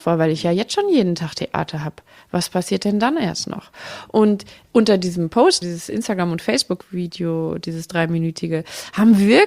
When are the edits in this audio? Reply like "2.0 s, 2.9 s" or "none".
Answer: 5.6 s